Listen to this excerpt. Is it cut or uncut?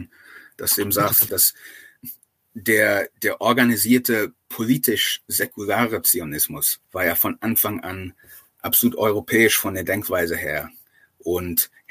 cut